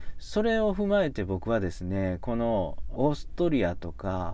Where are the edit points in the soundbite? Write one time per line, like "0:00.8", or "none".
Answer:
0:03.0